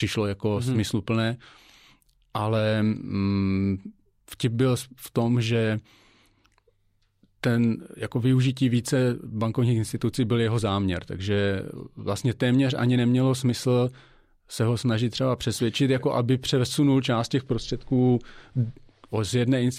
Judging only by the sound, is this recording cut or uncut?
uncut